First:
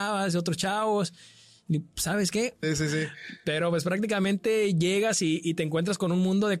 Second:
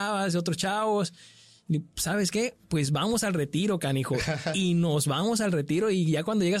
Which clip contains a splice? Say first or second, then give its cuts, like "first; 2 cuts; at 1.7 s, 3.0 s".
first; 1 cut; at 2.6 s